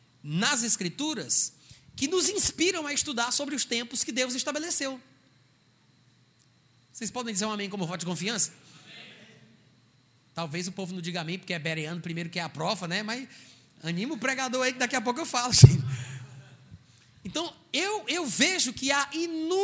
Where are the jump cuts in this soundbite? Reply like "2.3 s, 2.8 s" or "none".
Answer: none